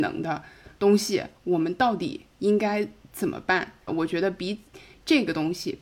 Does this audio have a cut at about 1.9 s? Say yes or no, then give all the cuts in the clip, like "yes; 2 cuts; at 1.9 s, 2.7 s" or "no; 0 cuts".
no; 1 cut; at 3.9 s